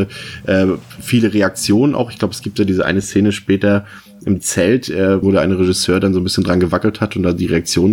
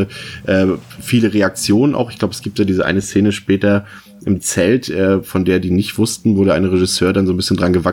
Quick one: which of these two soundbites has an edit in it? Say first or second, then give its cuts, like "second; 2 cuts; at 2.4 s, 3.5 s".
first; 1 cut; at 5.2 s